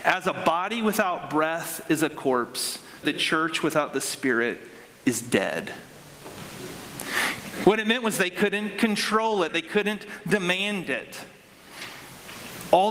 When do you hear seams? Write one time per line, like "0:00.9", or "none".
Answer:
0:03.0
0:07.6
0:09.5